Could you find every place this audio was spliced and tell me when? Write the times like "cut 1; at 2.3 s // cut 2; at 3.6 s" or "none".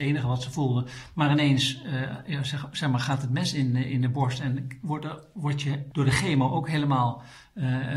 cut 1; at 5.9 s